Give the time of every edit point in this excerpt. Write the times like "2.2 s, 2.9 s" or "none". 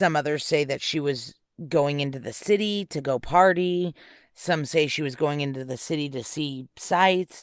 none